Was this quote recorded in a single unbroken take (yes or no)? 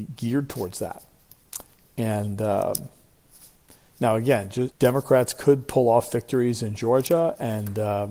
no